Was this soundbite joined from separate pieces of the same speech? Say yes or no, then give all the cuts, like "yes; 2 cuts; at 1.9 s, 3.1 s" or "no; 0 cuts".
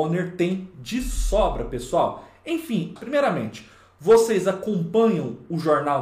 yes; 1 cut; at 3.0 s